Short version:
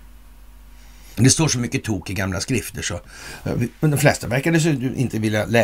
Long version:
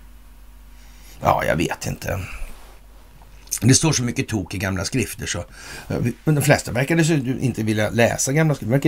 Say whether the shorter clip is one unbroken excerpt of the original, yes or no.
no